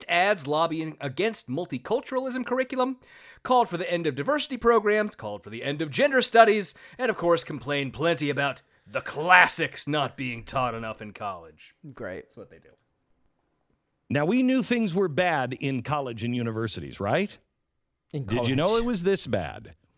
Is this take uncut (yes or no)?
yes